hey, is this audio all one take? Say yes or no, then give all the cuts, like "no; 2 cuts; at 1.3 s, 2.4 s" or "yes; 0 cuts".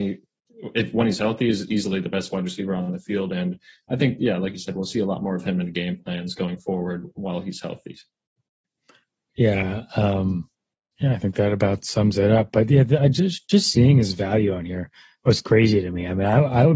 yes; 0 cuts